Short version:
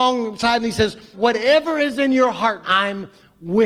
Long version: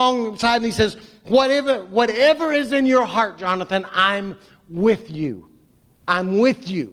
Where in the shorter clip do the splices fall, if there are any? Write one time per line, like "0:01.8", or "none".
0:01.1
0:02.6